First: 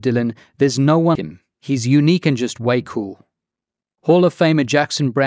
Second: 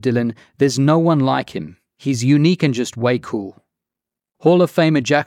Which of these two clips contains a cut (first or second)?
first